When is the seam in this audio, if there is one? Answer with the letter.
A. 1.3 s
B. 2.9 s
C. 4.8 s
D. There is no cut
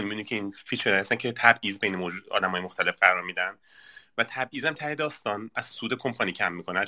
C